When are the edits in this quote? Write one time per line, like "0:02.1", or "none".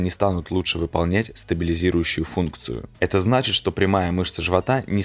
0:02.9